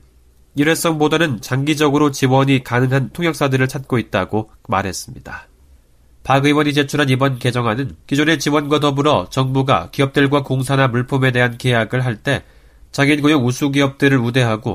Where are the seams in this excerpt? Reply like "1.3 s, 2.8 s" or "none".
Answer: 6.1 s, 8.0 s